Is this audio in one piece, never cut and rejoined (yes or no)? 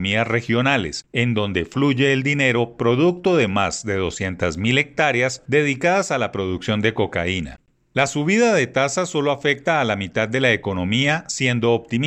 yes